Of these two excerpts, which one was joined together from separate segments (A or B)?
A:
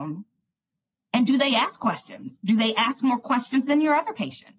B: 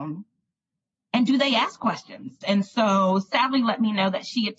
B